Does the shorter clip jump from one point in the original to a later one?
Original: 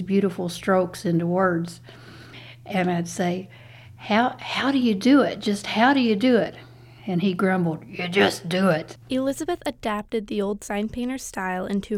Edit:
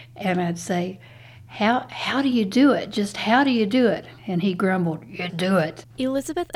yes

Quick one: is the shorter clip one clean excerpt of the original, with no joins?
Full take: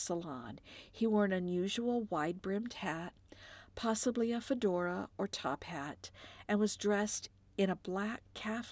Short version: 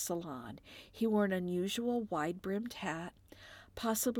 yes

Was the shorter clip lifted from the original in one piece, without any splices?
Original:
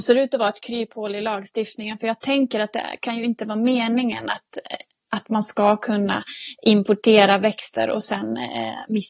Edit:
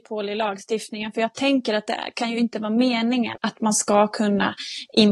no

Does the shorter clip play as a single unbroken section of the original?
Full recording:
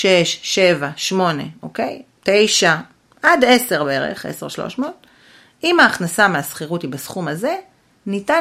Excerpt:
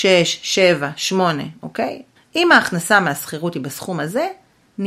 no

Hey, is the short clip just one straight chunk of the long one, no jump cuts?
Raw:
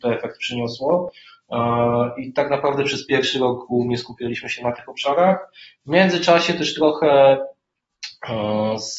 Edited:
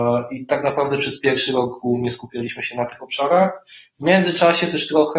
yes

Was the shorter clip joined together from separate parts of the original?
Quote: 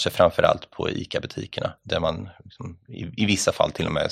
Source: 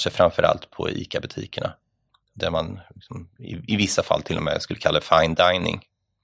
yes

